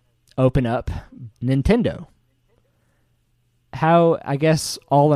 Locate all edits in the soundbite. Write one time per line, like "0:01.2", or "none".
0:01.3